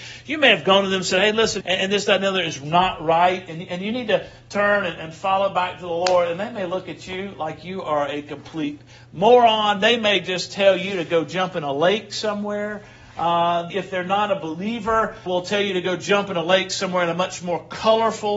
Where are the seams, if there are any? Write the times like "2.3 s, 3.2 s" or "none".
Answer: 1.6 s, 13.7 s, 15.3 s